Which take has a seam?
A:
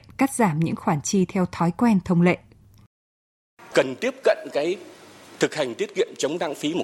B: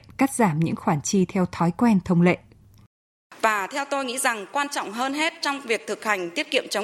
B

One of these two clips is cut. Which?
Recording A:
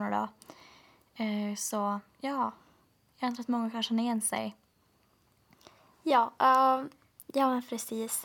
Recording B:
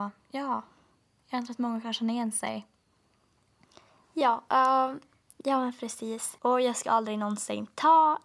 B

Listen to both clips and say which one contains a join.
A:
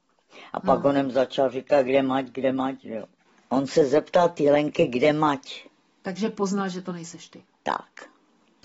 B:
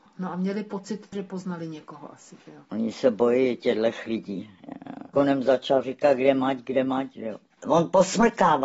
B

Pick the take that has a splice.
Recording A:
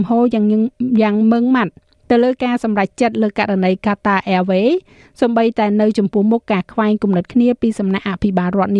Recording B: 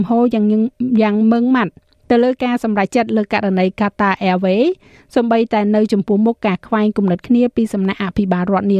B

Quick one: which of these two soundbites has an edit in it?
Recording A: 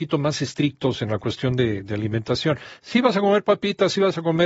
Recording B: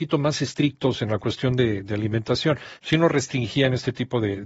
B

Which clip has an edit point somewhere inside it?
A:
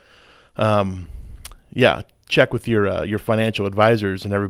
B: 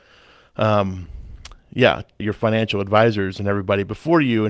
B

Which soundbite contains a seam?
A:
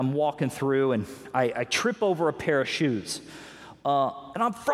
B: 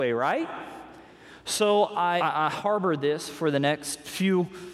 B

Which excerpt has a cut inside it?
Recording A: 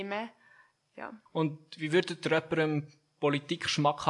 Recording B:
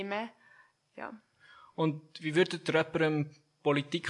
A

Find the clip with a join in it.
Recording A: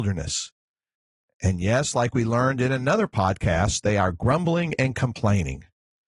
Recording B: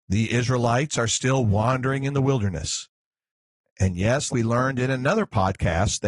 B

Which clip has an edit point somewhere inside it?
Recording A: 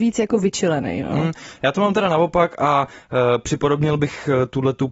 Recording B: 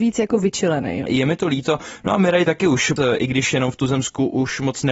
B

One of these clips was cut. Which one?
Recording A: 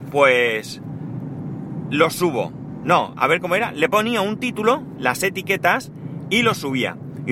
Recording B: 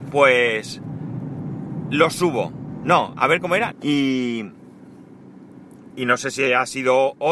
B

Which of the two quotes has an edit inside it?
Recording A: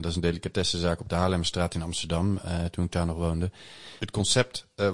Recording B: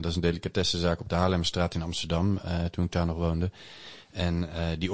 A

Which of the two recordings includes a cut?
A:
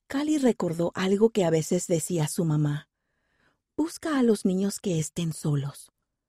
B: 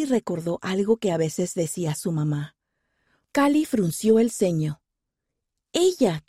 B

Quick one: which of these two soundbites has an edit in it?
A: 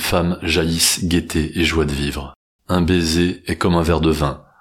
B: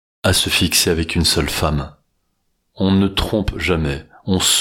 A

